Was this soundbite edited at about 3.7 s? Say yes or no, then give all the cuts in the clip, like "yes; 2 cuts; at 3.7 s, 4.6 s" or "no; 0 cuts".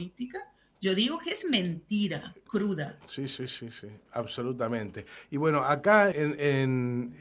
no; 2 cuts; at 2.5 s, 6.1 s